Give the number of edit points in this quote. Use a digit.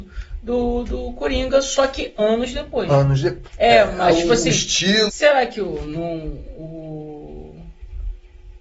2